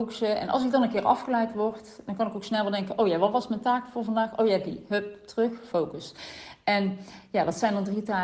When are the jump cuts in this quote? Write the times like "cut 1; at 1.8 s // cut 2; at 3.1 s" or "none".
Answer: none